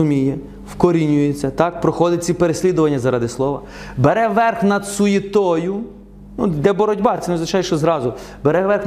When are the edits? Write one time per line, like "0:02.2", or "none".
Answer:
none